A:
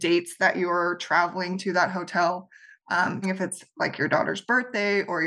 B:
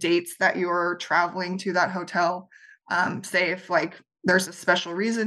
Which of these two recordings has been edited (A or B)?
A